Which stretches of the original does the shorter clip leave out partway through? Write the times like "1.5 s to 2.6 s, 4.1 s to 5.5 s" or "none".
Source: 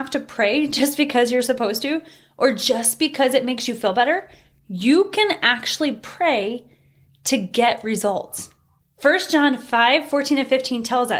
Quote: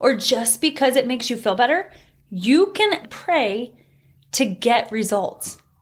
5.4 s to 5.9 s